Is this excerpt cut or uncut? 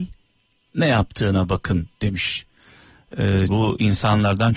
cut